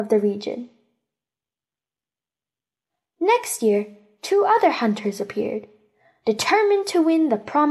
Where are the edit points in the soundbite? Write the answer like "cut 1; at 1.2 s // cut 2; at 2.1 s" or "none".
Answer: none